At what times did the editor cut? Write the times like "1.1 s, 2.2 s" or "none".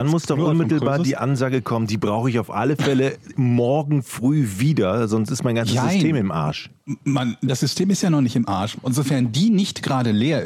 8.7 s